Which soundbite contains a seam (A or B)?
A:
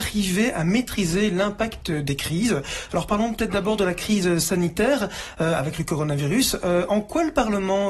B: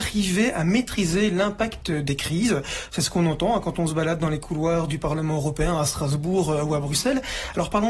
A